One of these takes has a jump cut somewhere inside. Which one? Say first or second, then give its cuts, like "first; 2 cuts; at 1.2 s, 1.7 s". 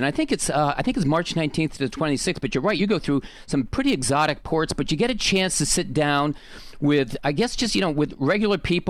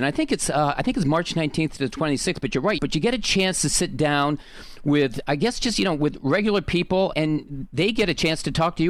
second; 2 cuts; at 2.8 s, 7.1 s